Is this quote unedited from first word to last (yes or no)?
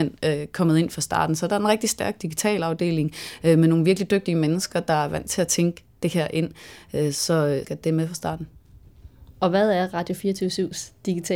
no